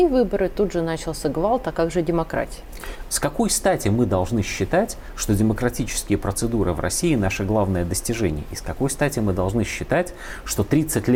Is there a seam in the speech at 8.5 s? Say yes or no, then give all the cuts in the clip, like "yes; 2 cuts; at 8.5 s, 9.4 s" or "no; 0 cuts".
no; 1 cut; at 3.1 s